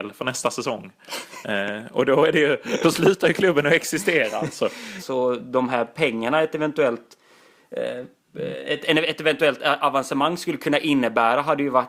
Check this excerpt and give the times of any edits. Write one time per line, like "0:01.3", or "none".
0:05.0